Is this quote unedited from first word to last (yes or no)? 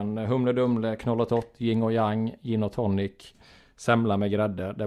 yes